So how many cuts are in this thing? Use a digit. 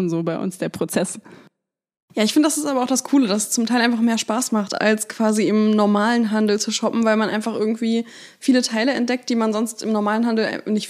0